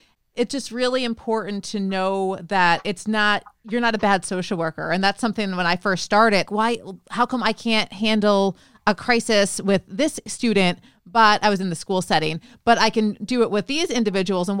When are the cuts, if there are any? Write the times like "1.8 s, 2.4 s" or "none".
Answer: 6.5 s